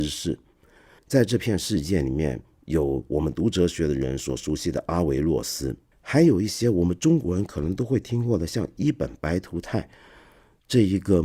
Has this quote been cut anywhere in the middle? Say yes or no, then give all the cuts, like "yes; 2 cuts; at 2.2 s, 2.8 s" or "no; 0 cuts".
yes; 2 cuts; at 1.0 s, 5.9 s